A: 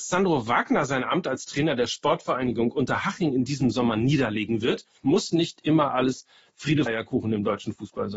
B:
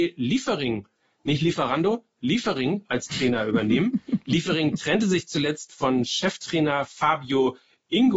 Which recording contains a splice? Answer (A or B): A